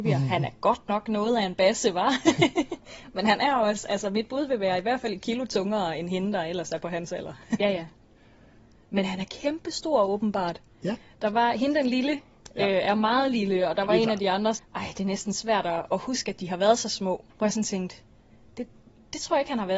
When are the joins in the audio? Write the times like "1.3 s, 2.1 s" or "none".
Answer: 7.6 s, 14.6 s, 17.3 s